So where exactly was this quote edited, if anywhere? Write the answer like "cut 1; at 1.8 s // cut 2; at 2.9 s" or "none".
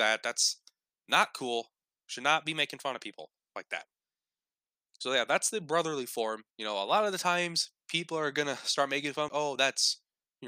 cut 1; at 6.5 s // cut 2; at 9.3 s